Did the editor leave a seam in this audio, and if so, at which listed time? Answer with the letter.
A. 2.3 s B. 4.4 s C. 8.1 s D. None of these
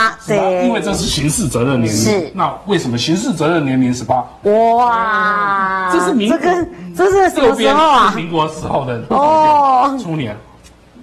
B